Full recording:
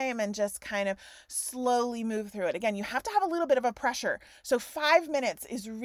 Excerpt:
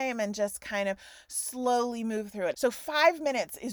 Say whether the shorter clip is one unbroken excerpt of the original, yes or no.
no